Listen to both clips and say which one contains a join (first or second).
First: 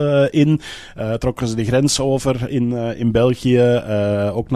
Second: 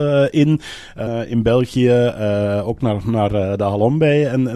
second